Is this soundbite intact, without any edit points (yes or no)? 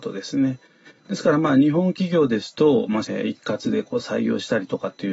no